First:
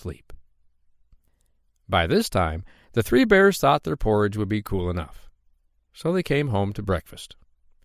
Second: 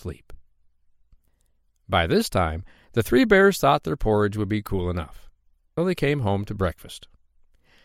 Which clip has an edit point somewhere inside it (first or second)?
second